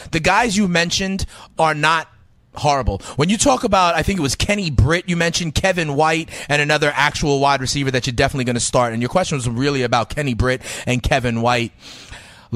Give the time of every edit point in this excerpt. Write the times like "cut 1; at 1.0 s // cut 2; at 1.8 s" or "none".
none